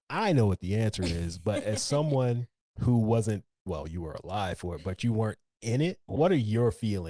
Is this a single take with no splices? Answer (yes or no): yes